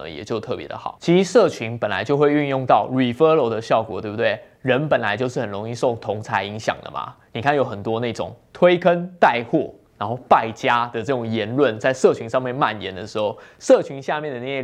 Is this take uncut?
yes; 0 cuts

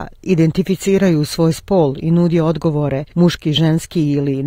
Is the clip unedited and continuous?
yes; 0 cuts

